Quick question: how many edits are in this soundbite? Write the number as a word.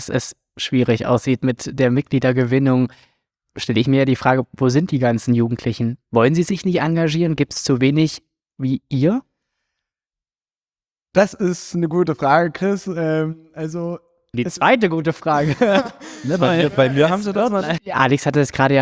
two